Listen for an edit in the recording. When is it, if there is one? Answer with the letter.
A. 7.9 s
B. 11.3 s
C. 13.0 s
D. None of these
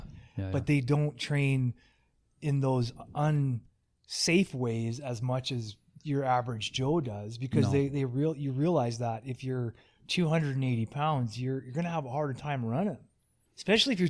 D